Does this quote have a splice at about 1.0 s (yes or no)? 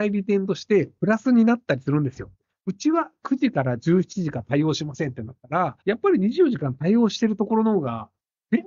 no